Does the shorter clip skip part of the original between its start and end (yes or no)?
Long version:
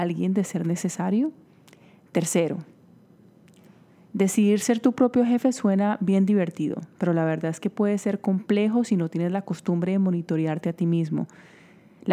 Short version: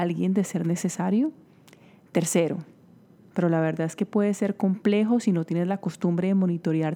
yes